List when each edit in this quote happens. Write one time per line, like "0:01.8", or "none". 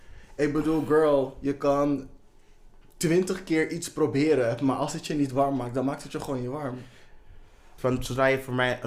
0:07.8